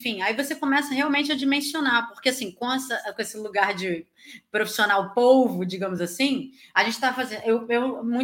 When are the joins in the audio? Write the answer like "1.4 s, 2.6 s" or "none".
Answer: none